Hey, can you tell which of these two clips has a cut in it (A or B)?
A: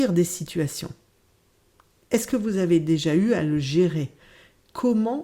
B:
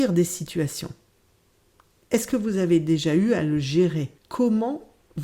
B